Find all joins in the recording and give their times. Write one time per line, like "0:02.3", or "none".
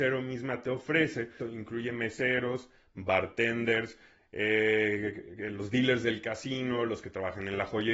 0:01.4